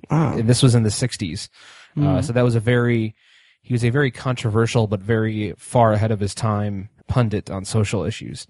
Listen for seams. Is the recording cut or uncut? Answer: cut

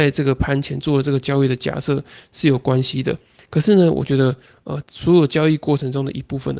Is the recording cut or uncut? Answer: cut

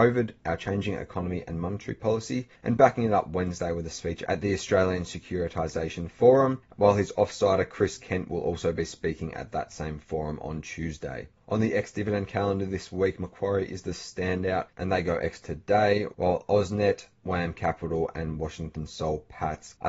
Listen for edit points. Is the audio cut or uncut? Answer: uncut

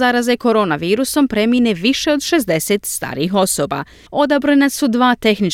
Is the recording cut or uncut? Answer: cut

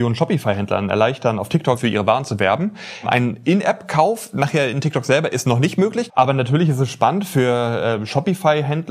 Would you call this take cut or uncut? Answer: cut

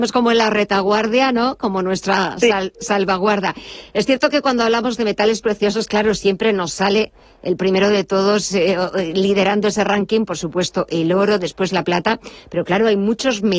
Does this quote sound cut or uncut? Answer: uncut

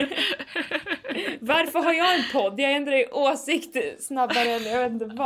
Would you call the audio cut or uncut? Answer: uncut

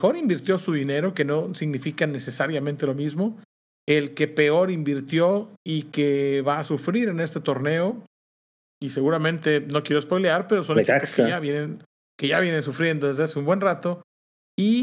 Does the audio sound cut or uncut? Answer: uncut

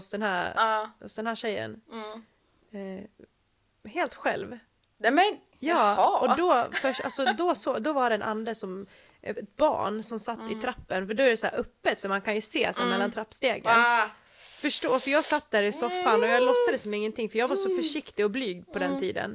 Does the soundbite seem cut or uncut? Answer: uncut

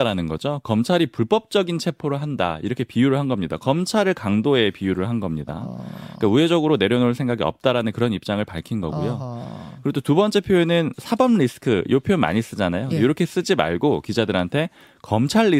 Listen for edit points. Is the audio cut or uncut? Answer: uncut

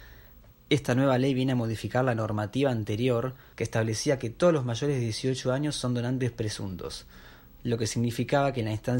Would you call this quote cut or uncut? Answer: cut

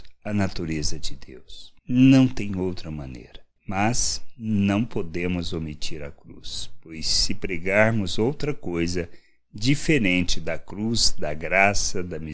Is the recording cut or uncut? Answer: cut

